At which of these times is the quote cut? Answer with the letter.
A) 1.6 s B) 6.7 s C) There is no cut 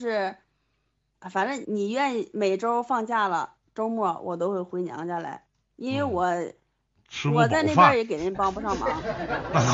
A